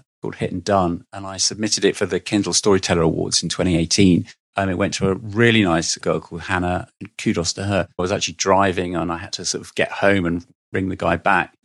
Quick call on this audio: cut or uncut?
cut